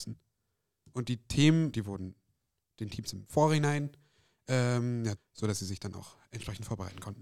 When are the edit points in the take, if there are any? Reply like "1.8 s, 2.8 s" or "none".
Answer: 1.7 s, 5.2 s